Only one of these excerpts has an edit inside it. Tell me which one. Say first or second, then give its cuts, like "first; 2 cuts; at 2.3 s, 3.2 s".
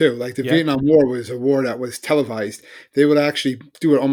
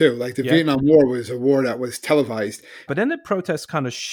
second; 1 cut; at 2.9 s